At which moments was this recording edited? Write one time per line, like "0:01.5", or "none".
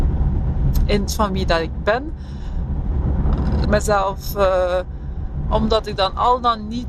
0:01.1
0:03.6
0:05.5